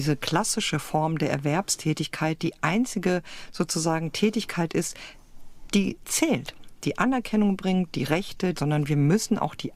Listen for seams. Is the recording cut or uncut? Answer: cut